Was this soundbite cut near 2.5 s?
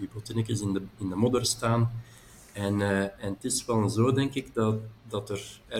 no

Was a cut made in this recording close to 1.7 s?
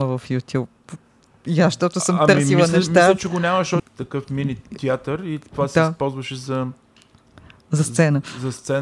no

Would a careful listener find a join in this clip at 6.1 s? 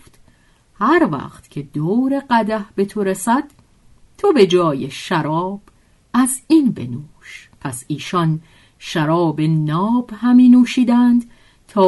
no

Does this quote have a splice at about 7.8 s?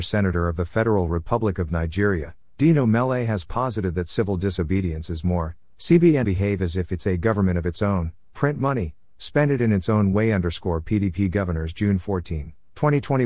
no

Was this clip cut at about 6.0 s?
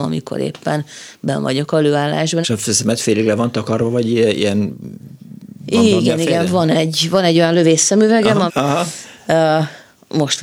no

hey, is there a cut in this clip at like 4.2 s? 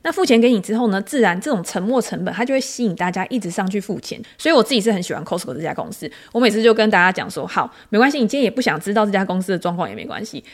yes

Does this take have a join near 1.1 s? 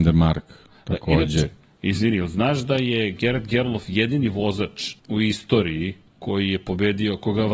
no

